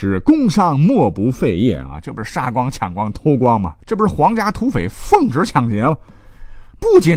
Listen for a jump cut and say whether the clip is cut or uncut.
uncut